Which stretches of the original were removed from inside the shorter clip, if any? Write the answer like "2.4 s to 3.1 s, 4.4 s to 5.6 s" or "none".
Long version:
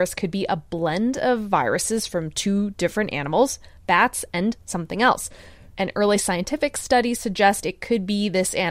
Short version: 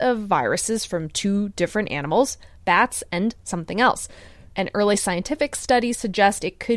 none